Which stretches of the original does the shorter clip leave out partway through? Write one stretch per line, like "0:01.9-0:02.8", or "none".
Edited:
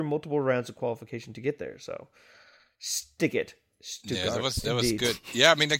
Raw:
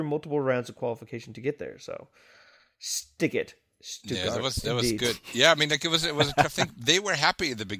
none